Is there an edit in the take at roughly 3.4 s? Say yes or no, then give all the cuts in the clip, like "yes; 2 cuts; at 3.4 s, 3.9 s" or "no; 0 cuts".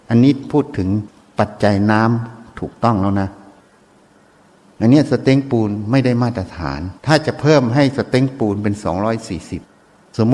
no; 1 cut; at 7.0 s